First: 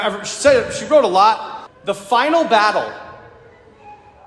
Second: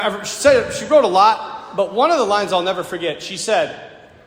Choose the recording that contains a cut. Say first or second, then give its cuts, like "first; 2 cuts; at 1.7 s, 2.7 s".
first; 1 cut; at 1.7 s